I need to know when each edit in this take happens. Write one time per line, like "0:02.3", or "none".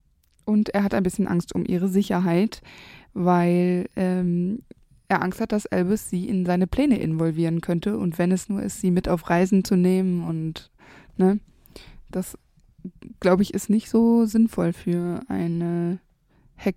none